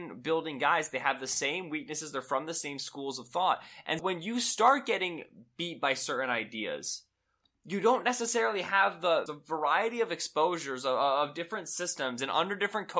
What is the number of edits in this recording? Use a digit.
2